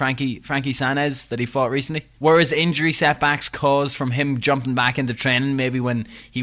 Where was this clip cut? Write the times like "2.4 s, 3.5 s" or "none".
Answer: 2.2 s